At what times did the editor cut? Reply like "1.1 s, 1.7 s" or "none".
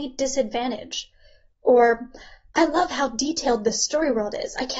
1.5 s

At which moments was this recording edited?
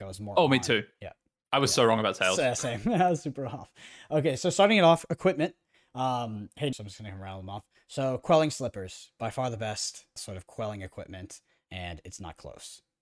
6.7 s, 10.2 s

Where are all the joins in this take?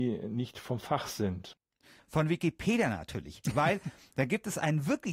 2.0 s

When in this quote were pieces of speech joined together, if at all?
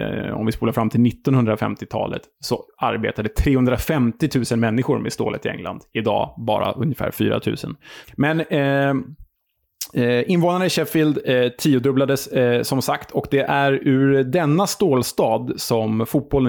8.0 s

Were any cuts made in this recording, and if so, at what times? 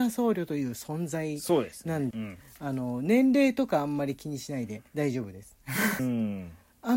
2.1 s, 4.9 s, 6.0 s

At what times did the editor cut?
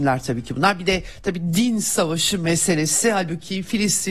none

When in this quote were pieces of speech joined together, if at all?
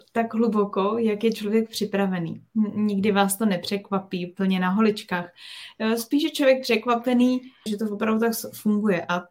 7.7 s

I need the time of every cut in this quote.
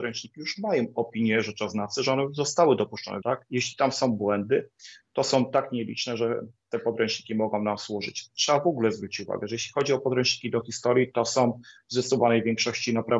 3.2 s

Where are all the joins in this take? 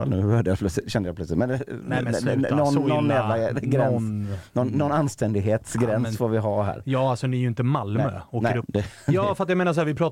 8.6 s

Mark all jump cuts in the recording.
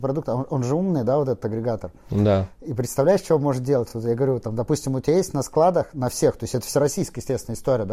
none

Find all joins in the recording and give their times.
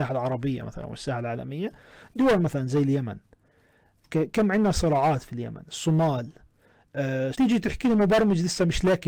7.3 s

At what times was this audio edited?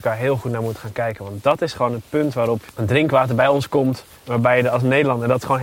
4.2 s

